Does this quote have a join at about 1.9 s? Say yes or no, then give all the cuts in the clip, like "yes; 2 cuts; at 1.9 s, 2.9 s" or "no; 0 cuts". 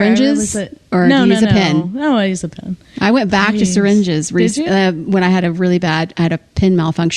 no; 0 cuts